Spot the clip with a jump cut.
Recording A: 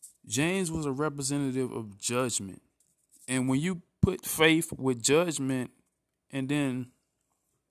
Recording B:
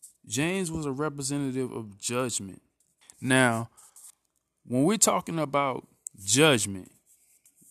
B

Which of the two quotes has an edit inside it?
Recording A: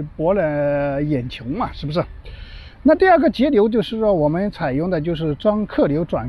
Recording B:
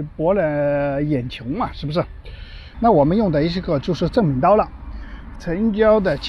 B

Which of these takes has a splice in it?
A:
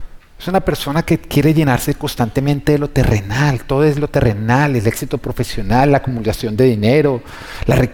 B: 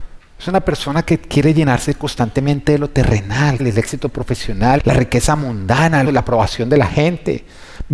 B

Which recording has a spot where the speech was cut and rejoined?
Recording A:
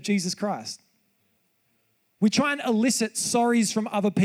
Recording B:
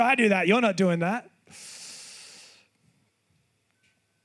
A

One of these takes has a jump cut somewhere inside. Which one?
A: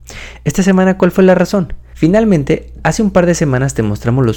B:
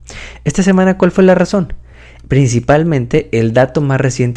A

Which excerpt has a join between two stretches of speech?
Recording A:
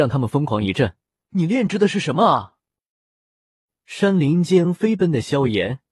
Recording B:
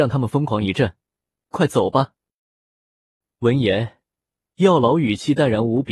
A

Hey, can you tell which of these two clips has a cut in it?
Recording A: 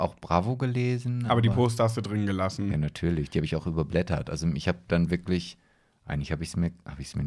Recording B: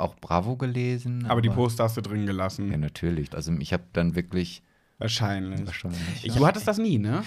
B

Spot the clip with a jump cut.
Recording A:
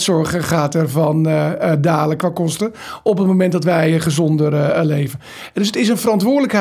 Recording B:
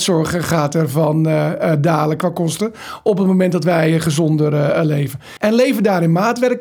B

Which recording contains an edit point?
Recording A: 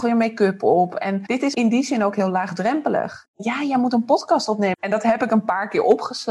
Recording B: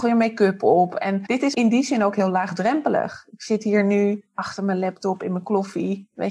A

